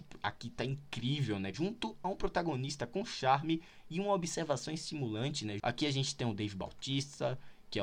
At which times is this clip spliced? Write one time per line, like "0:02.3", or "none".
0:01.5
0:05.6